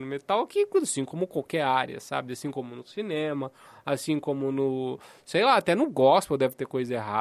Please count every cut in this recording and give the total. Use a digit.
0